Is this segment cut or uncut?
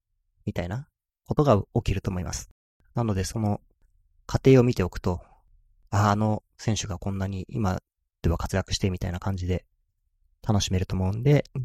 uncut